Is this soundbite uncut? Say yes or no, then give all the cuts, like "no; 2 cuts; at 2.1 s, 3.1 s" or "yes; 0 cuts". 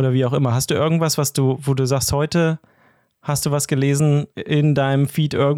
no; 1 cut; at 4.3 s